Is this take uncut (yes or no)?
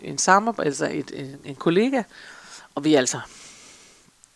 yes